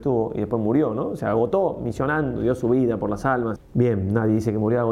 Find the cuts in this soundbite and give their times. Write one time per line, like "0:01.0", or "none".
0:03.6